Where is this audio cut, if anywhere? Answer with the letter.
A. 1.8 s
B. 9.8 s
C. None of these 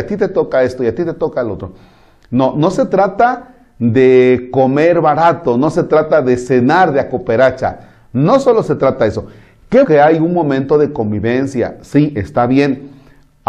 B